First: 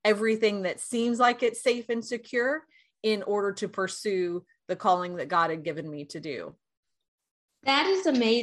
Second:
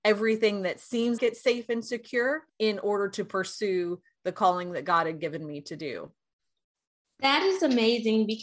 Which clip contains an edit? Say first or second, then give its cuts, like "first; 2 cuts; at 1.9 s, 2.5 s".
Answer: second; 2 cuts; at 1.2 s, 2.5 s